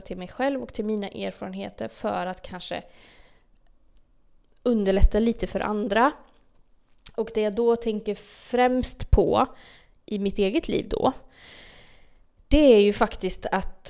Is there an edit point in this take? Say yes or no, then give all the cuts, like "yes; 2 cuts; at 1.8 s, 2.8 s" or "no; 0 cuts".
no; 0 cuts